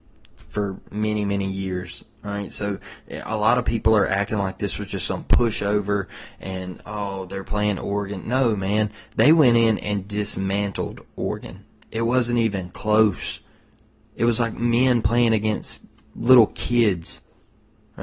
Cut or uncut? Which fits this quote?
uncut